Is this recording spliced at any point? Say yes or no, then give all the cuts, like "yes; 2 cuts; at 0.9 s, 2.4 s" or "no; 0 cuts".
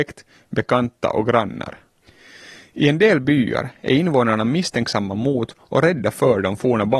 no; 0 cuts